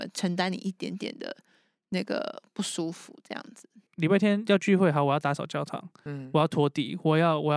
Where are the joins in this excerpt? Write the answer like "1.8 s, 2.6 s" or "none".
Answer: 3.9 s